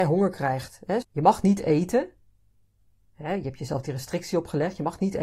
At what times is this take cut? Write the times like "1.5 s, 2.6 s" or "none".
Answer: 1.0 s